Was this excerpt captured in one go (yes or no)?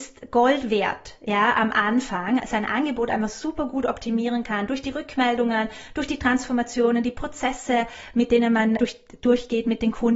no